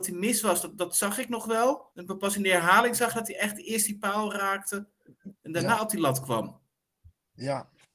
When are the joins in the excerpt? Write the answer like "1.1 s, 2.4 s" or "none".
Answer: 1.9 s